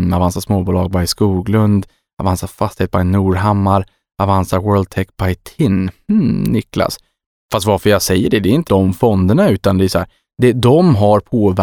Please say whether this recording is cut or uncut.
cut